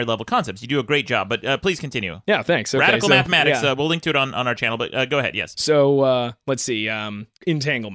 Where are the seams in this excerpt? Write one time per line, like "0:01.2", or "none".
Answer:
none